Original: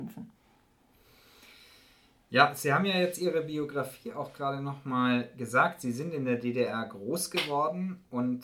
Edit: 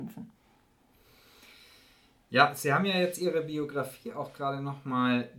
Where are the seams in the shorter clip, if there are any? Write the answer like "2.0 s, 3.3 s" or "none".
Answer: none